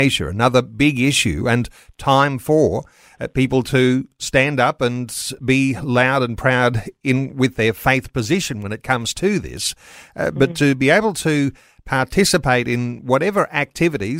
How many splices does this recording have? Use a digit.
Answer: 0